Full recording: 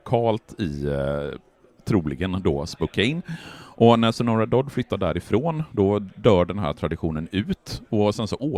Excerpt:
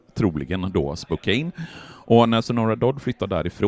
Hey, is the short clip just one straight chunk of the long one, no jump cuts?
yes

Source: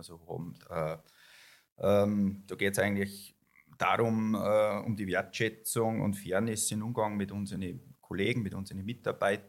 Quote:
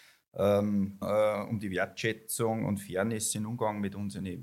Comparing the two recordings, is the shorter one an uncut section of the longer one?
no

